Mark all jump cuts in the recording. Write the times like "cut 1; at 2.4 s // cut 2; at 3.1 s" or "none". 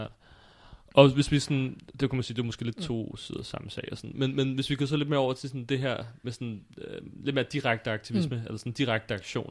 none